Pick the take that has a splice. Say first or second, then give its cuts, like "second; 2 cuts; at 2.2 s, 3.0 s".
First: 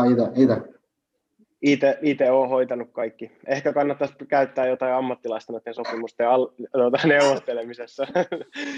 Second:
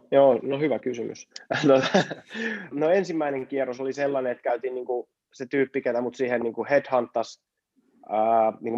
second; 1 cut; at 2.7 s